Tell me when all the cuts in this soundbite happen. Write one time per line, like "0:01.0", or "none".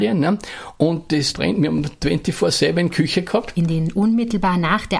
0:01.3
0:03.5